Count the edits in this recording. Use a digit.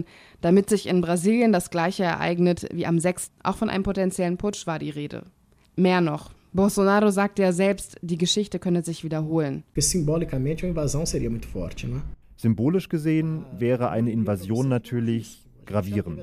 2